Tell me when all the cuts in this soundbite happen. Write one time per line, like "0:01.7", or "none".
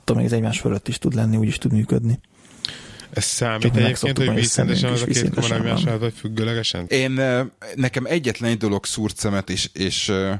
0:06.9
0:09.5